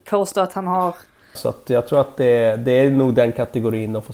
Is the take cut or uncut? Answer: cut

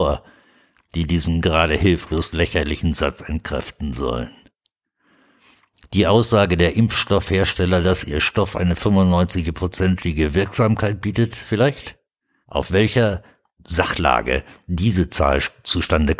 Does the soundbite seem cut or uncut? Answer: cut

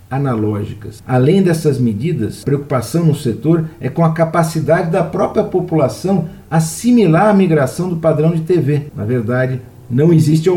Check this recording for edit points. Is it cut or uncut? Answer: cut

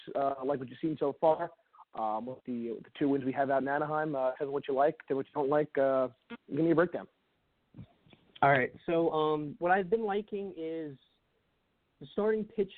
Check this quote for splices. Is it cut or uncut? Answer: uncut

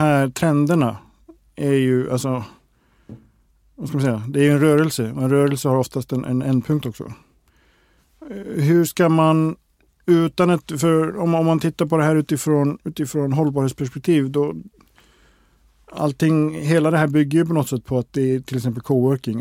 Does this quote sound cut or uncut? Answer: uncut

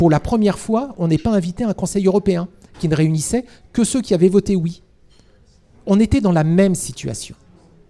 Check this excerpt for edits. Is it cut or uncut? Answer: uncut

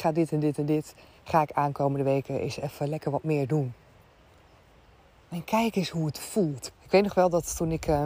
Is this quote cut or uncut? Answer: cut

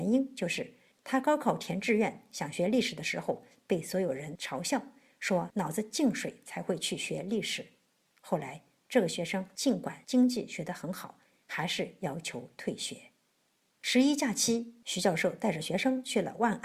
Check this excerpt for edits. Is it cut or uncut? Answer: cut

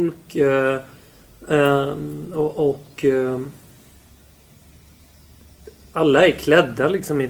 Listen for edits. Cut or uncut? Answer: uncut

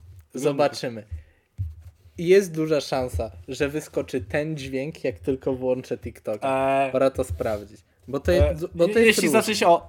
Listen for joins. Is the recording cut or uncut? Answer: uncut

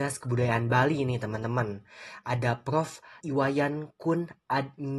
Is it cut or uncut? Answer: cut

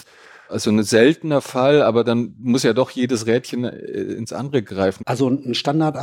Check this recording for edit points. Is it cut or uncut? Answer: cut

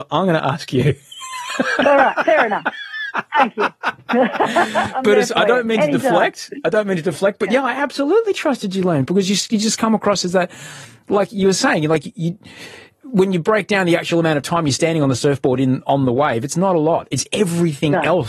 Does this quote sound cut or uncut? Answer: uncut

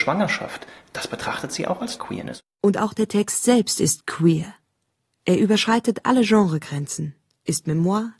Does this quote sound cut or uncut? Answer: uncut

